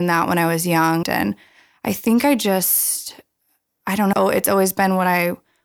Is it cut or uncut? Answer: cut